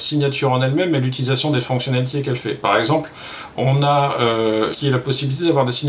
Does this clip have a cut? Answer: yes; 1 cut; at 4.7 s

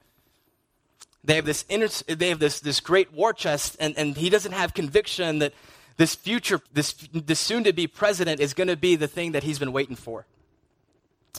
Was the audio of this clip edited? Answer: yes; 1 cut; at 6.7 s

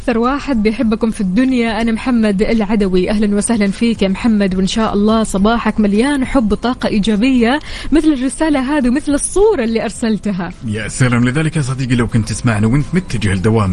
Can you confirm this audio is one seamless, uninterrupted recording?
yes; 0 cuts

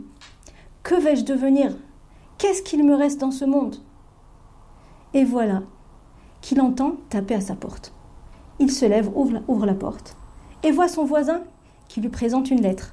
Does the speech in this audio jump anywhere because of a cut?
no; 0 cuts

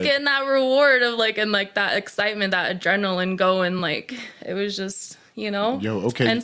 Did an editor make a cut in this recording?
no; 0 cuts

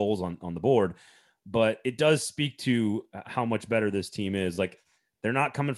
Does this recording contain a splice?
no; 0 cuts

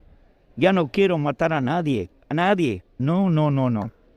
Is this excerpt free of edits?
no; 1 cut; at 3.0 s

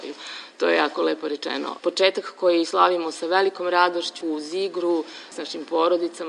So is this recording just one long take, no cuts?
no; 3 cuts; at 1.8 s, 4.2 s, 5.3 s

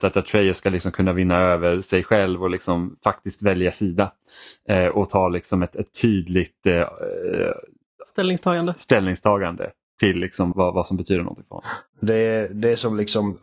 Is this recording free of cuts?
no; 2 cuts; at 10.5 s, 11.9 s

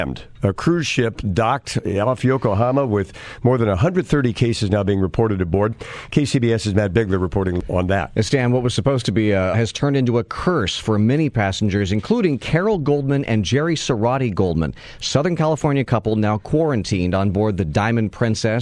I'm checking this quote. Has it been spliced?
yes; 1 cut; at 9.5 s

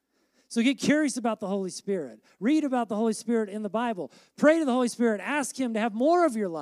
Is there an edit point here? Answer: no; 0 cuts

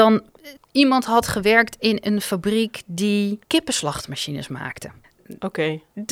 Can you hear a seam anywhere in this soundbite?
yes; 1 cut; at 3.4 s

